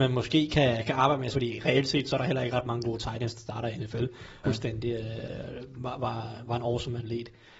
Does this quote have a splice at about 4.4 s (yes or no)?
yes